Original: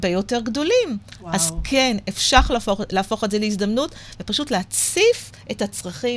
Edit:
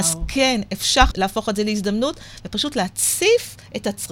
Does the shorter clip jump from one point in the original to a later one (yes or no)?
yes